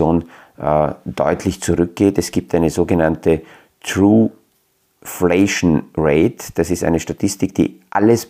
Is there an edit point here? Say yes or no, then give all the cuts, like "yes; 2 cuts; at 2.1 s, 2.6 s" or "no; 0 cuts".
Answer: no; 0 cuts